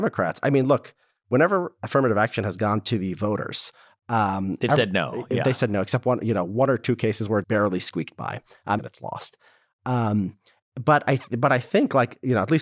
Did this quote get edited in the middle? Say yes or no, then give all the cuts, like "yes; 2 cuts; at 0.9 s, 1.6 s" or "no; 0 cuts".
yes; 2 cuts; at 7.4 s, 8.8 s